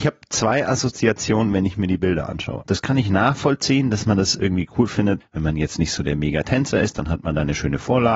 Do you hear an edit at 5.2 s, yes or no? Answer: yes